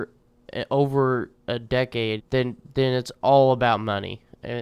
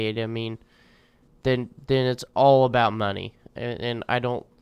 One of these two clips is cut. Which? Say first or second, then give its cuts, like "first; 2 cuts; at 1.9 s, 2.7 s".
first; 1 cut; at 2.2 s